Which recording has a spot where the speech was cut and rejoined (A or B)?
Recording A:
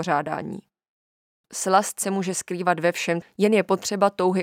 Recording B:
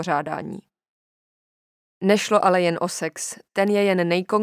A